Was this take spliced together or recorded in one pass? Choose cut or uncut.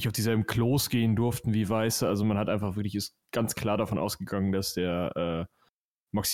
uncut